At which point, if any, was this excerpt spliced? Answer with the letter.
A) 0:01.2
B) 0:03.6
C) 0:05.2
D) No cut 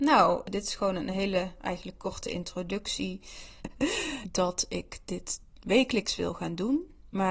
B